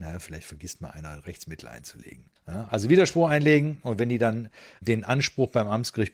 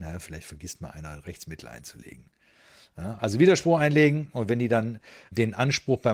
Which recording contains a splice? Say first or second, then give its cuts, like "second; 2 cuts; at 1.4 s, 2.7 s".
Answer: first; 1 cut; at 2.4 s